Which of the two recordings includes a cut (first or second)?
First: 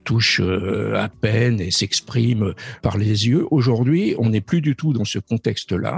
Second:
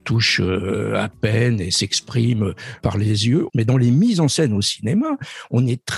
second